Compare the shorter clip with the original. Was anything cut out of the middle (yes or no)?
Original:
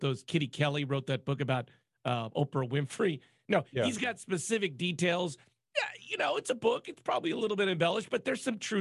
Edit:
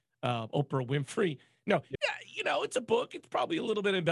yes